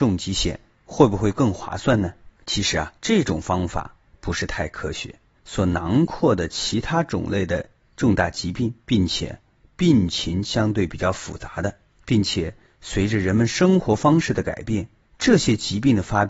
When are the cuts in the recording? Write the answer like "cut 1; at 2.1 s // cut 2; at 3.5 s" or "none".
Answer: cut 1; at 3.0 s // cut 2; at 5.4 s // cut 3; at 8.8 s